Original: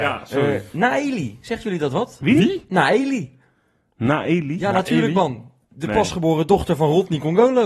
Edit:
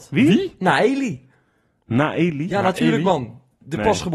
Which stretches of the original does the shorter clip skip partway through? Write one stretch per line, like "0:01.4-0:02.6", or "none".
none